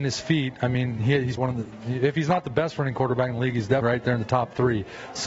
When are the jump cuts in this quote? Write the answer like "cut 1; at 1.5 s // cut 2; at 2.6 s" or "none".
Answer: cut 1; at 1.4 s // cut 2; at 3.8 s